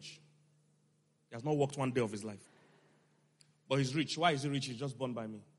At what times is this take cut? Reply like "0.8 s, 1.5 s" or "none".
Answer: 2.4 s